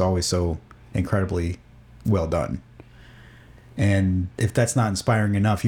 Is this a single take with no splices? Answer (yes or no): no